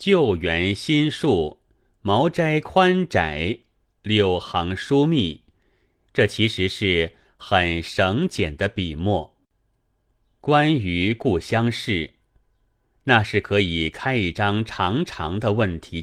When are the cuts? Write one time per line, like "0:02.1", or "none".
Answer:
0:06.1